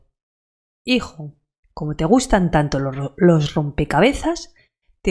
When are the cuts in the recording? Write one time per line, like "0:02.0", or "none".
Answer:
none